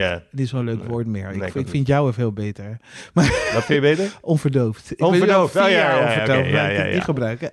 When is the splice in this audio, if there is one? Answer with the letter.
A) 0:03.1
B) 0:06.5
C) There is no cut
C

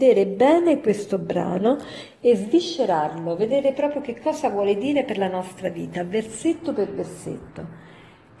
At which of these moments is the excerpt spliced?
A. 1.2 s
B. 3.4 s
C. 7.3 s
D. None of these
D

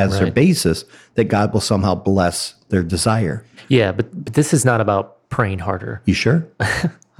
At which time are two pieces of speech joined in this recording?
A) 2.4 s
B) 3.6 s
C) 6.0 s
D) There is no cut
D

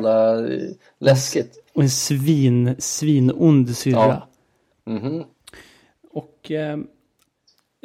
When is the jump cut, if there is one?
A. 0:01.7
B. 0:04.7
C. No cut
B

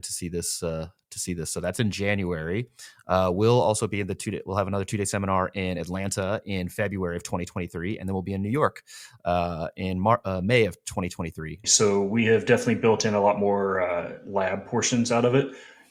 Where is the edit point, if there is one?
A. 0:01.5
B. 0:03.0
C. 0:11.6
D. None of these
C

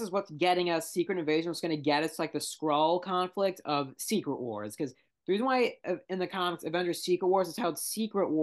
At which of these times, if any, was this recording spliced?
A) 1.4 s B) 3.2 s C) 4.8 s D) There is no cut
D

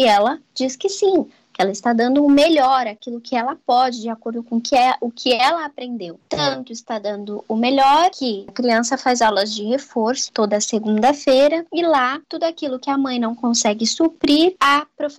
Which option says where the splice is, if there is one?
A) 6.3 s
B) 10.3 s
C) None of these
B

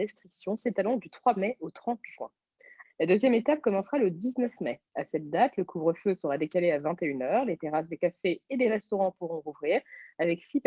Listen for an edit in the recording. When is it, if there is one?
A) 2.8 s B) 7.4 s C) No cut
A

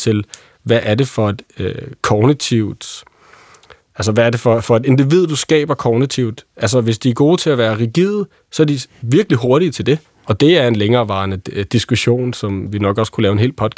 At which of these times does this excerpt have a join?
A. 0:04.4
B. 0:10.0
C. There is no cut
B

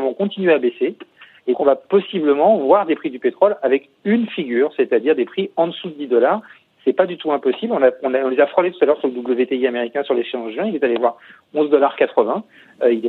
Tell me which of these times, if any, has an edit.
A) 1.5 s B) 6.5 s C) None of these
A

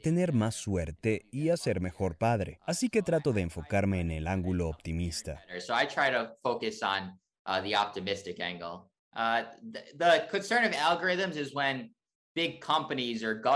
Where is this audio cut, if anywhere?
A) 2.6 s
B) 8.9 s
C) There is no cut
B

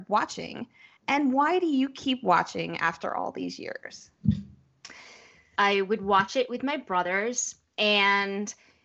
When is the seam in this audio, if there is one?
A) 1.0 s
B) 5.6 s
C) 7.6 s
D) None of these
B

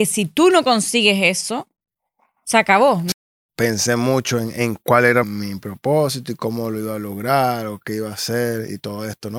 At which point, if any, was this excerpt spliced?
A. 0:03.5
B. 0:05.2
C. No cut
B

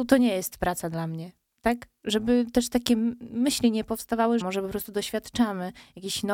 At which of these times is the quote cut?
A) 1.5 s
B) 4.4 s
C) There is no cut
B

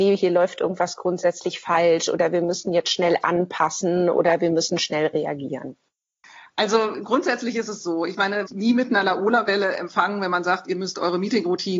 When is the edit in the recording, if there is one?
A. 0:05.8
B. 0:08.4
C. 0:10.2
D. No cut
B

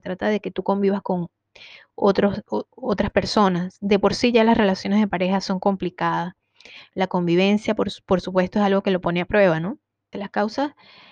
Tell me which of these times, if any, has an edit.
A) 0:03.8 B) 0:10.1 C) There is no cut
B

